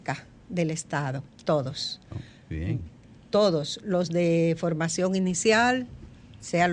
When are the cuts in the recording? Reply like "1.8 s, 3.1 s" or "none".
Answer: 1.4 s